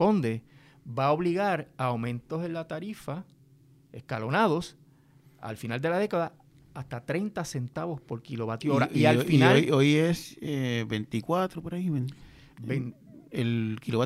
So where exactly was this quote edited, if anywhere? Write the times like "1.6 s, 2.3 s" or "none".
none